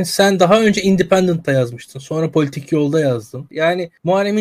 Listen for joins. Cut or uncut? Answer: cut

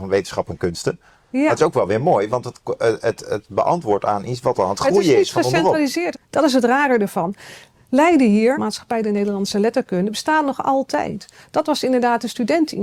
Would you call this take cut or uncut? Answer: cut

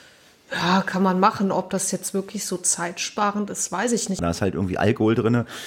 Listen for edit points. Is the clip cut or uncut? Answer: cut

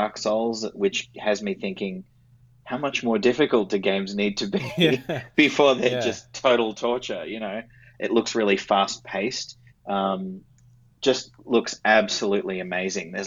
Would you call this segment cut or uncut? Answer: cut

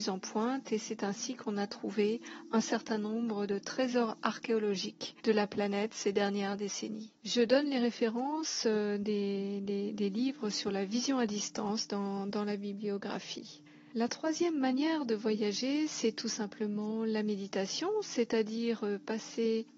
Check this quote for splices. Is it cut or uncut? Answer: uncut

